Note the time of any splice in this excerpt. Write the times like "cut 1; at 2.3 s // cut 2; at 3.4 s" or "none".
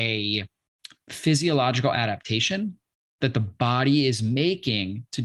cut 1; at 1.1 s